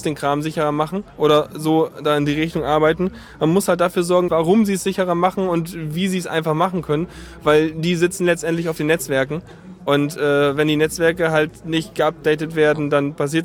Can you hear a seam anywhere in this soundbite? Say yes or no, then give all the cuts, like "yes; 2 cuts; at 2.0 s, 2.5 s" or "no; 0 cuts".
yes; 1 cut; at 4.3 s